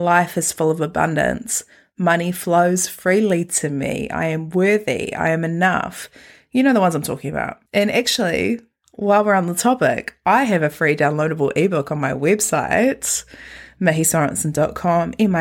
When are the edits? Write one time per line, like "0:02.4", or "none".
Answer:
0:07.7